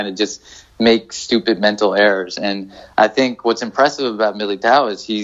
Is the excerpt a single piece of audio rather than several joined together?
yes; 0 cuts

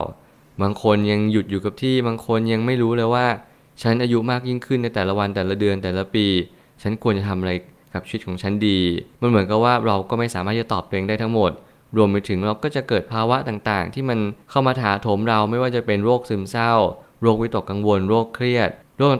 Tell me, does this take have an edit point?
yes; 2 cuts; at 9.1 s, 14.4 s

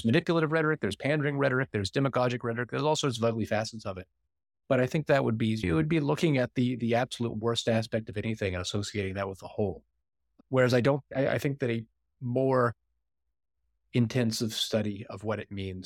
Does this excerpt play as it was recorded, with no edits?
yes; 0 cuts

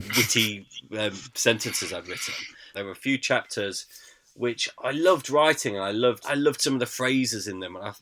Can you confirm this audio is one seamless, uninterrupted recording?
no; 2 cuts; at 2.7 s, 6.2 s

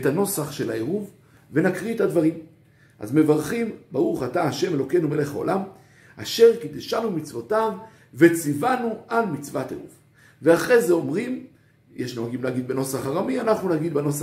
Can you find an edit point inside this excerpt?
no; 0 cuts

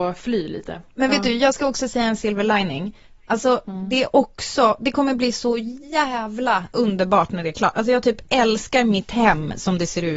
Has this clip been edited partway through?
no; 0 cuts

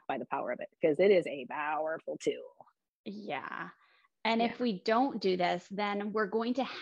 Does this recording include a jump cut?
no; 0 cuts

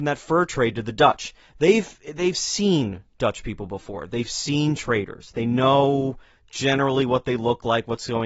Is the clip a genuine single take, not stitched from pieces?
yes; 0 cuts

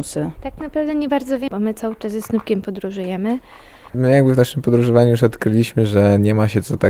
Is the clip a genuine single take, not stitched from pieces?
no; 2 cuts; at 1.5 s, 3.9 s

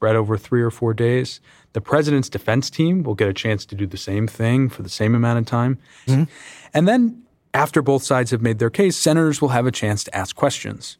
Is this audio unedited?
no; 1 cut; at 6.1 s

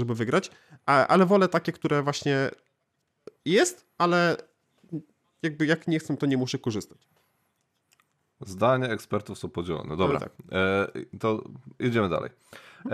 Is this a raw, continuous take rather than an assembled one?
yes; 0 cuts

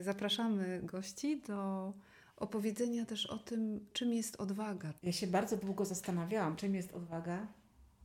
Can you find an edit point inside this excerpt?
yes; 2 cuts; at 5.0 s, 6.6 s

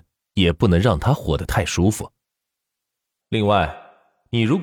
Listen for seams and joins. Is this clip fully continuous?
no; 1 cut; at 3.2 s

